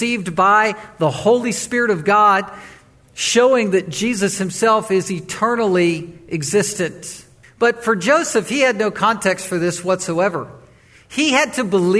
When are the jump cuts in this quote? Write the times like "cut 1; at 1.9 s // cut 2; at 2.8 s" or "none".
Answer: cut 1; at 7.4 s